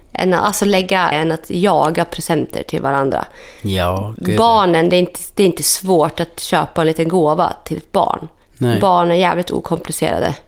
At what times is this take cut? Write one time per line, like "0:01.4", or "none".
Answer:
0:01.1